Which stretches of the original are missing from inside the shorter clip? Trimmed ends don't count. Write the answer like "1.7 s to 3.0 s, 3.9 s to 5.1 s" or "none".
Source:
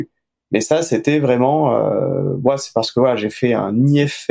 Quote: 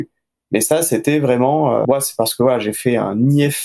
1.8 s to 2.4 s

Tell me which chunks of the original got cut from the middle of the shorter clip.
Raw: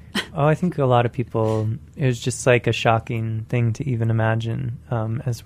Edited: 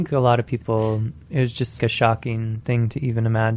2.4 s to 2.6 s

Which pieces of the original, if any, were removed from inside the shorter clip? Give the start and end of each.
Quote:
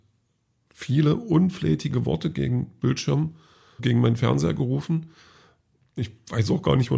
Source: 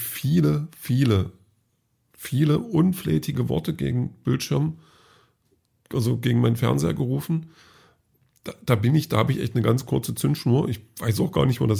5.2 s to 6.2 s, 8.4 s to 10.7 s

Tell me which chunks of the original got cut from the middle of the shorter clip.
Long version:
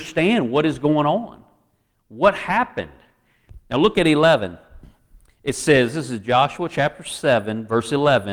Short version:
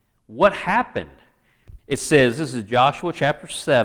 3.6 s to 5.3 s

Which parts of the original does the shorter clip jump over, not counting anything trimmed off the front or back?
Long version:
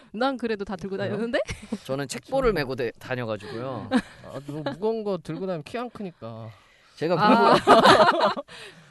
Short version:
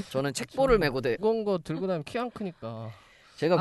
2.9 s to 4.8 s

